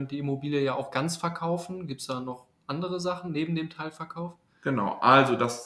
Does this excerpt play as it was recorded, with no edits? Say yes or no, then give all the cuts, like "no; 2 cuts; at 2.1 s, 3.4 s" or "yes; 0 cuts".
yes; 0 cuts